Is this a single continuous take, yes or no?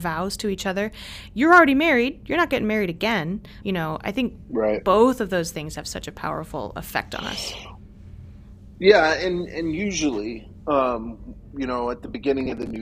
no